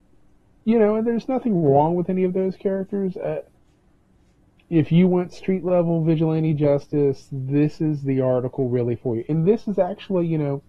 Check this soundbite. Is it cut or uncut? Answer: uncut